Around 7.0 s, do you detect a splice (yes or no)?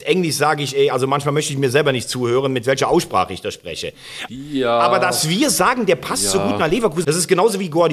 yes